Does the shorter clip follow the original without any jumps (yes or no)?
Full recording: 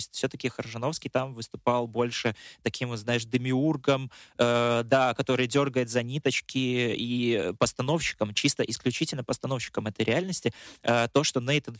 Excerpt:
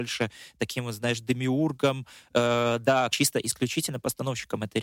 no